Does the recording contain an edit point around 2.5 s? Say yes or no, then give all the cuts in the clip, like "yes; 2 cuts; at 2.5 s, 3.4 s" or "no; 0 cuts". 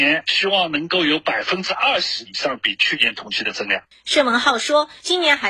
no; 1 cut; at 3.9 s